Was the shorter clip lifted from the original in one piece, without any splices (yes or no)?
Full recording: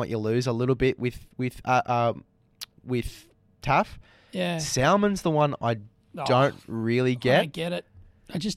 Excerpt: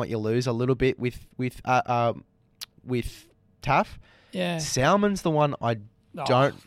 yes